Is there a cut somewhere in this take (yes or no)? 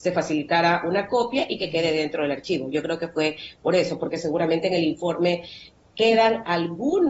no